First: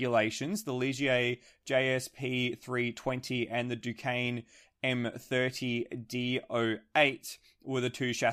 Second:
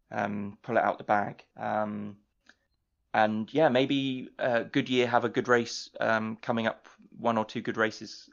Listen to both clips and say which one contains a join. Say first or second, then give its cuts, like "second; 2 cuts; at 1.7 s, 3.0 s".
second; 1 cut; at 1.5 s